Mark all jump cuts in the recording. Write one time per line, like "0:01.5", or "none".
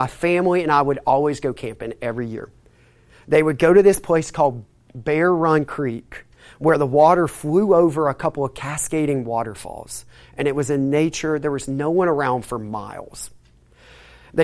none